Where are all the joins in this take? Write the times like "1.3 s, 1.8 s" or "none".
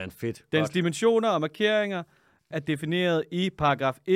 2.5 s